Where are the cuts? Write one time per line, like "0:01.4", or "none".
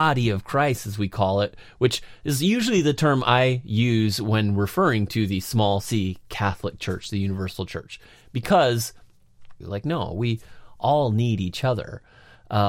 0:09.6